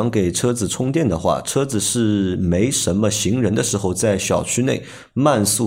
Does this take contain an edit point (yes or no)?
no